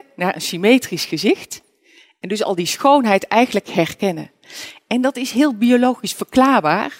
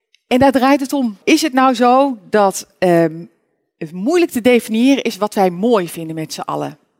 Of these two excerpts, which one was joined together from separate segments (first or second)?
second